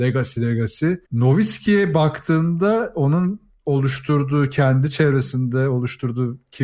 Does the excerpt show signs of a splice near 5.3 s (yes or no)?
no